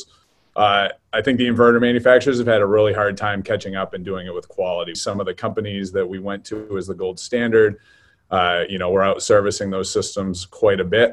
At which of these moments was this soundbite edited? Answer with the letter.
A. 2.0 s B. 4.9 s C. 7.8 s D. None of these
B